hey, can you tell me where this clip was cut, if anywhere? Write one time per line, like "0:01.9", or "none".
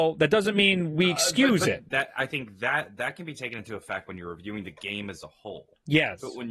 0:01.9